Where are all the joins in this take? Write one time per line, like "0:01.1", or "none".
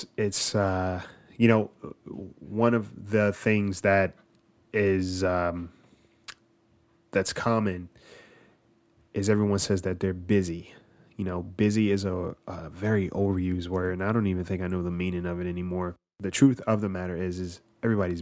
none